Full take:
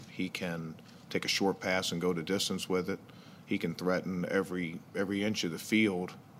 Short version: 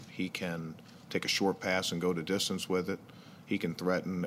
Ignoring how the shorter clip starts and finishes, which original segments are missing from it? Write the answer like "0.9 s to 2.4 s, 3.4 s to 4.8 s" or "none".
none